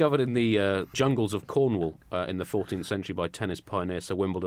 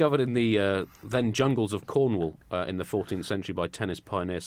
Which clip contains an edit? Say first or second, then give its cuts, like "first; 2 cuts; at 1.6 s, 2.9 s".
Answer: first; 1 cut; at 0.9 s